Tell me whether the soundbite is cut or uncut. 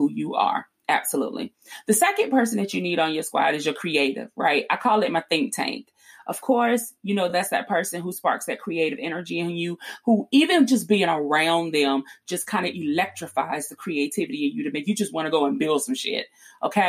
uncut